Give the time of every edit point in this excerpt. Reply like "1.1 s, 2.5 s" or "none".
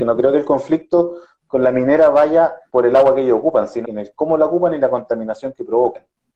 2.7 s, 3.8 s